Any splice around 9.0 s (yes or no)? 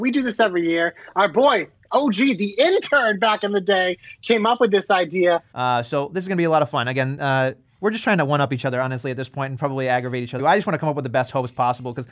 no